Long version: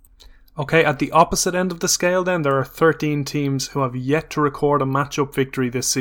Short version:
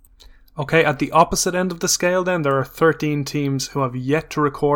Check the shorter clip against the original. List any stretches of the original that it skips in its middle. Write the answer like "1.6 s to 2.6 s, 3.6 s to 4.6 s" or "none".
none